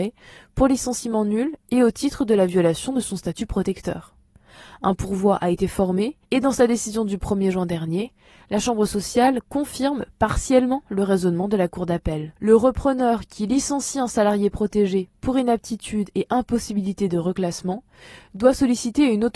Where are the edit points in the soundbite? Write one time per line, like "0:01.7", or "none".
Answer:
0:06.2
0:12.4